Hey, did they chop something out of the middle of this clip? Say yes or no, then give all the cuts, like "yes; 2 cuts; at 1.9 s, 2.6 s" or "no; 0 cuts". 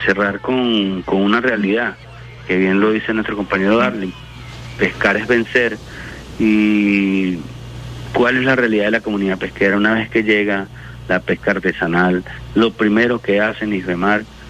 yes; 1 cut; at 1.0 s